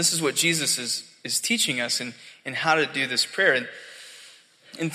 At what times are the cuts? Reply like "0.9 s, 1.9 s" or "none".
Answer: none